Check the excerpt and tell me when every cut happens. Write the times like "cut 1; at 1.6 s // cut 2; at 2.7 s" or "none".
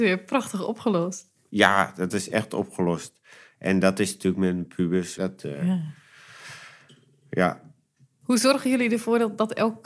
cut 1; at 5.1 s